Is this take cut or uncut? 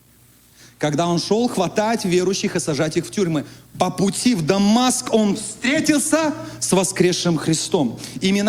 uncut